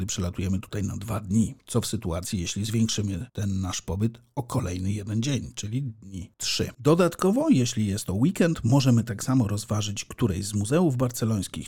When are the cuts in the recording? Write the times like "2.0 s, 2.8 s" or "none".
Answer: 6.7 s